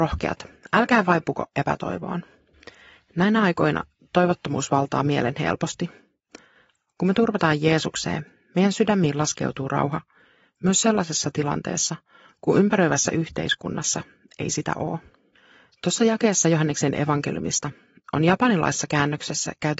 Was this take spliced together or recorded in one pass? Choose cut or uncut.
uncut